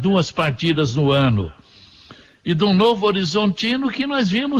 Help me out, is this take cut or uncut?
uncut